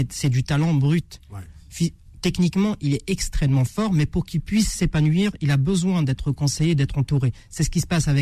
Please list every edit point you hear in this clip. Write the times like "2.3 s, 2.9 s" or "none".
none